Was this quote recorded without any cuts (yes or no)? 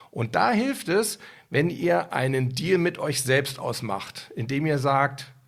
yes